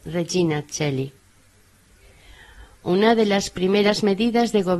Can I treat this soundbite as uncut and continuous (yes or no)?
yes